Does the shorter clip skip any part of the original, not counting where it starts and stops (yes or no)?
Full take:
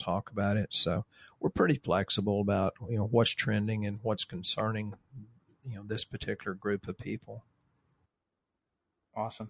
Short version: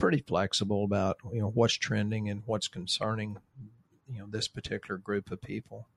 no